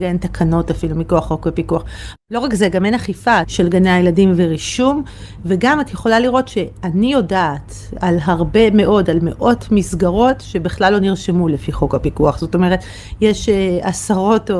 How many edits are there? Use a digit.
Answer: 2